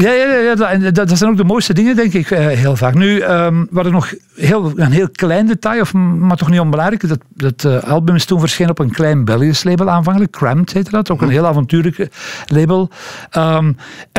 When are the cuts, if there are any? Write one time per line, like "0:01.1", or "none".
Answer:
none